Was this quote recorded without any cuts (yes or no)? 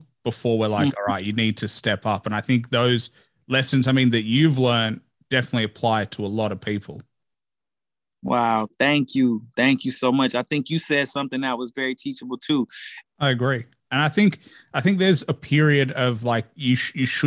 no